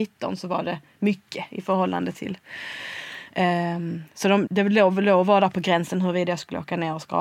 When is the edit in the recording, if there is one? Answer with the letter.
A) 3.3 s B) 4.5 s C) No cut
B